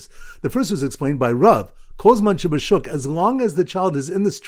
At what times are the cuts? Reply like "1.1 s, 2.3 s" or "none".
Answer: none

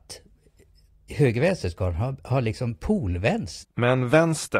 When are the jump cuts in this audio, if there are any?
3.6 s

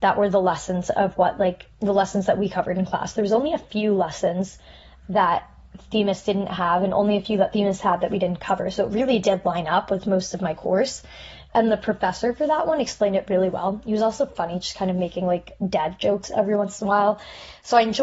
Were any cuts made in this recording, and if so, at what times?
none

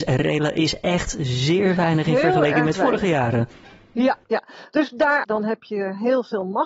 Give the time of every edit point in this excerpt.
4.2 s, 5.2 s

